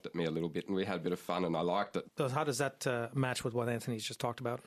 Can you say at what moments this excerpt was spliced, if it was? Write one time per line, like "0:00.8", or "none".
0:02.0

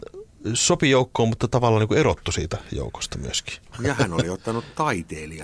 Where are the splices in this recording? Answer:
0:03.7

